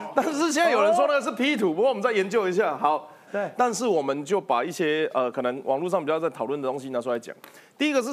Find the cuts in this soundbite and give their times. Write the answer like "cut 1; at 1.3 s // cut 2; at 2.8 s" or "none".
cut 1; at 3.3 s